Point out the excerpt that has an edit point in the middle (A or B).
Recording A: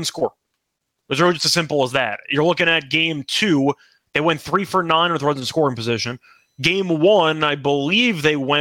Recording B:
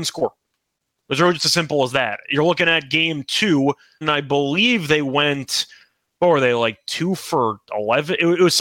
B